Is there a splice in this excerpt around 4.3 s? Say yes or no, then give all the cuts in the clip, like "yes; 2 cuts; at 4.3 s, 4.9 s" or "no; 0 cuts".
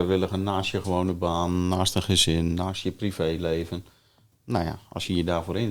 yes; 1 cut; at 4.3 s